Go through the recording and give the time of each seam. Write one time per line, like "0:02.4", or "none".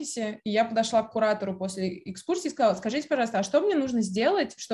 none